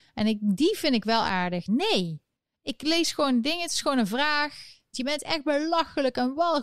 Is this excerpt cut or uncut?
cut